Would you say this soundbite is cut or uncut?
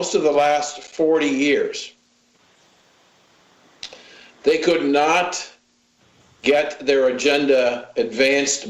uncut